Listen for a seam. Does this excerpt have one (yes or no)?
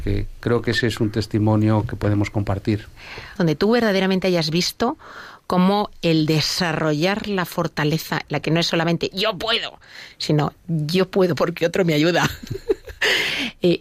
yes